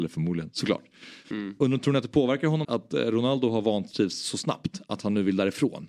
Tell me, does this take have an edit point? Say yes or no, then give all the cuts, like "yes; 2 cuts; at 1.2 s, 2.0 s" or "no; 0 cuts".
yes; 2 cuts; at 1.2 s, 2.6 s